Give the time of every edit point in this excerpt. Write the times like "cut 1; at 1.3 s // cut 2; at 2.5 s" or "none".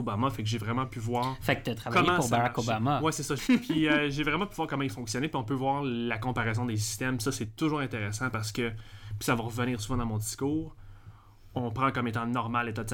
cut 1; at 3.4 s